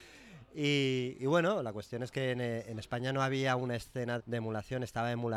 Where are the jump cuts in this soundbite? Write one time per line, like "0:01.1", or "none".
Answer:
0:04.2